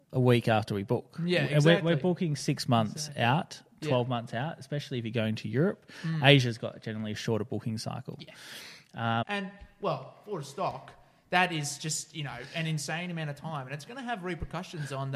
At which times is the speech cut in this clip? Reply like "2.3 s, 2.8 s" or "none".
9.2 s